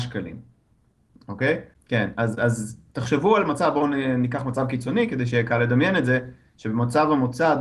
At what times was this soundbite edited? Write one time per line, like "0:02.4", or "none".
0:01.7